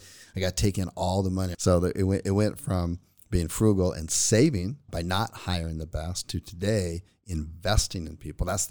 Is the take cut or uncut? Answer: cut